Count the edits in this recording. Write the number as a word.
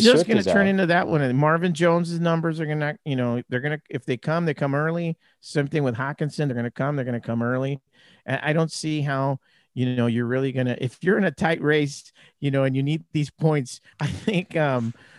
one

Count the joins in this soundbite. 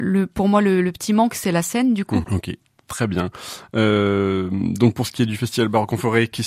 one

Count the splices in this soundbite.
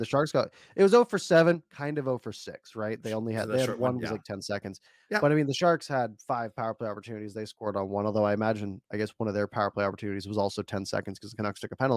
zero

